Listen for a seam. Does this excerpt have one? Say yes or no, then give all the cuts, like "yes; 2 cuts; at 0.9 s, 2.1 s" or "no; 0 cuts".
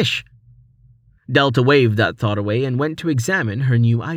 yes; 1 cut; at 1.2 s